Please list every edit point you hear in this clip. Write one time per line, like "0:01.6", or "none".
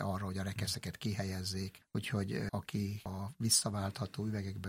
none